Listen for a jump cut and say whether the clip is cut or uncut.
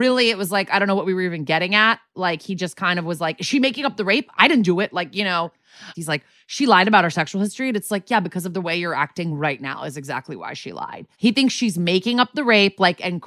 cut